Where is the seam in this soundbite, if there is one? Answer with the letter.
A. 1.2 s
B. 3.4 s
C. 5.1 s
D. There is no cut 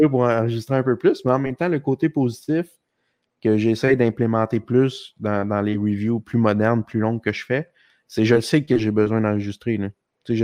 D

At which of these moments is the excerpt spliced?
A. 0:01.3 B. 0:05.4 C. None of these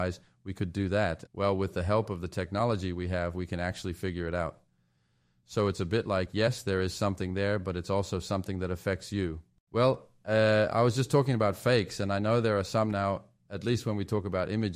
A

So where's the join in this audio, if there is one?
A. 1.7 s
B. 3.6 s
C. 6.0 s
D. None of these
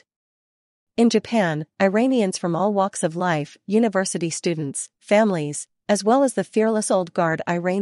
B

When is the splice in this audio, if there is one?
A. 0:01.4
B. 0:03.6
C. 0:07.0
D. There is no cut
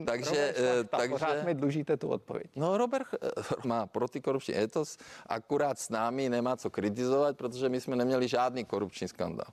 B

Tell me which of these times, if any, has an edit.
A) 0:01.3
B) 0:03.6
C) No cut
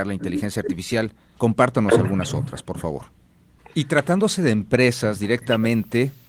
B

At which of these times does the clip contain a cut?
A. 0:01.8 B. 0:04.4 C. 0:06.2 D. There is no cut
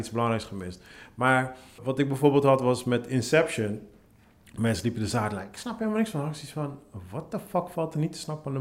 A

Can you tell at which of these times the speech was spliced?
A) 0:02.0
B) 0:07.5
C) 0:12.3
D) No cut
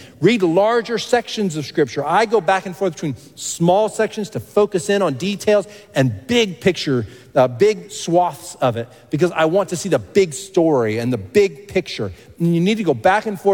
D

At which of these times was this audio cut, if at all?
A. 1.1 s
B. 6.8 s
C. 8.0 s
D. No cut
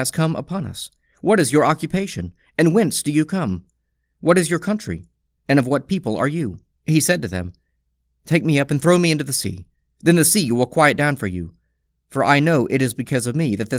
B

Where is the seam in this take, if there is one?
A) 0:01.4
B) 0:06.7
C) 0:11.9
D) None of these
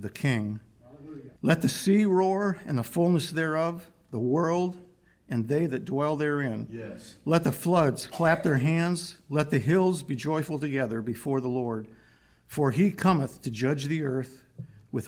A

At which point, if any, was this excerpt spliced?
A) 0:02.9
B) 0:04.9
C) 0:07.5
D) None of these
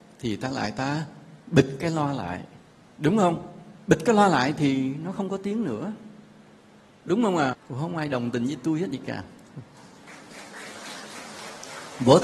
C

